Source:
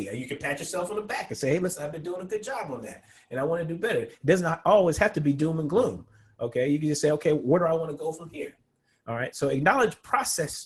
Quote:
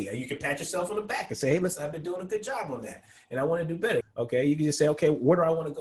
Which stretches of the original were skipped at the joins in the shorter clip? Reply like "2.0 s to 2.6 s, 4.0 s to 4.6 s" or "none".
4.0 s to 6.2 s